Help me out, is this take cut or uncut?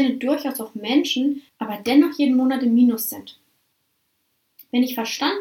cut